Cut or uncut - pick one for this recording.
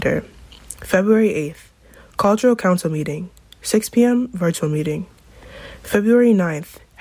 uncut